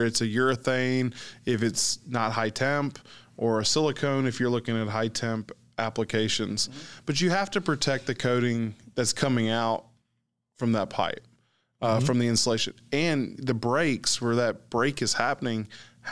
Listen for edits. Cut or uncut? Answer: uncut